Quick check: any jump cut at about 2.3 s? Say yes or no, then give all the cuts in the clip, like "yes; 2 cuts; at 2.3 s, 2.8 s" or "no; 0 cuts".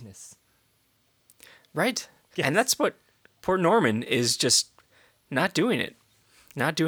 yes; 1 cut; at 2.3 s